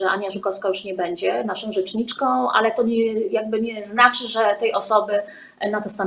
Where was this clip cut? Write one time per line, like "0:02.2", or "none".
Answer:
none